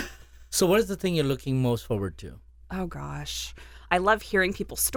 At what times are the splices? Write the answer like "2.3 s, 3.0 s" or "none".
3.9 s